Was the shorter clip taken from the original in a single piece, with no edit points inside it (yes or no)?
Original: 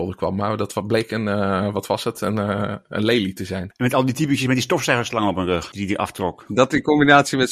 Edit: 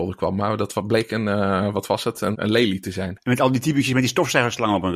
no